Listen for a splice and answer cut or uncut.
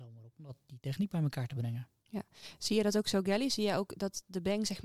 uncut